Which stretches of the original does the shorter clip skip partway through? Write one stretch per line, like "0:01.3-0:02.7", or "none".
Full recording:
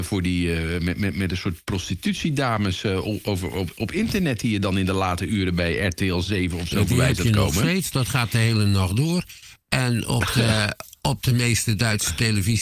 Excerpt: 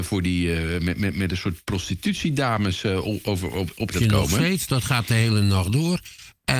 0:03.9-0:07.2